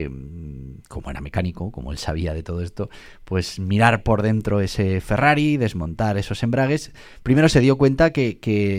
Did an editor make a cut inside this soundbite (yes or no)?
no